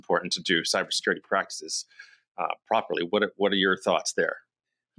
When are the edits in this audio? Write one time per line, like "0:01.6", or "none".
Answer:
none